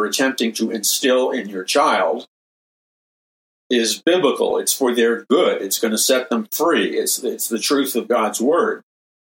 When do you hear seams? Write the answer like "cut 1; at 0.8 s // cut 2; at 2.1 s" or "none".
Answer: none